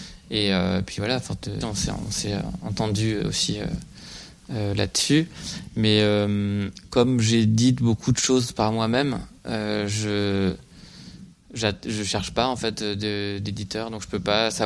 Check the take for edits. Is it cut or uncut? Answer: cut